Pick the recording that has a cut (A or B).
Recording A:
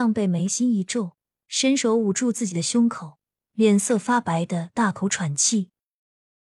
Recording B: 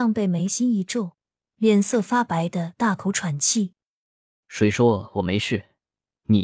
B